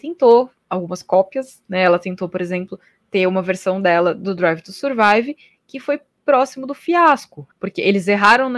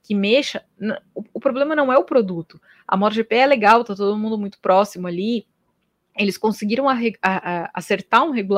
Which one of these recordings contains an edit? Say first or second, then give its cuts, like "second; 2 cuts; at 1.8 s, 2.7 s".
first; 1 cut; at 7.5 s